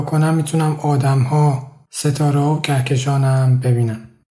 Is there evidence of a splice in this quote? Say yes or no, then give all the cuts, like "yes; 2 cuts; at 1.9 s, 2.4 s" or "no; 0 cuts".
yes; 1 cut; at 1.9 s